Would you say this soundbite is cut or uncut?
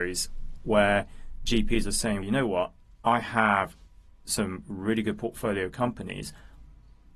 cut